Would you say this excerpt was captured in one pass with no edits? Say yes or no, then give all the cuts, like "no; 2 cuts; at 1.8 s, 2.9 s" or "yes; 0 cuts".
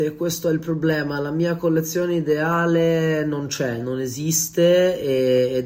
yes; 0 cuts